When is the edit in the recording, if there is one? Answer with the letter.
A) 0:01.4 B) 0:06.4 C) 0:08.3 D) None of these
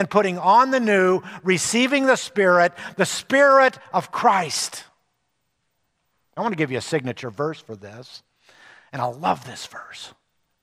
B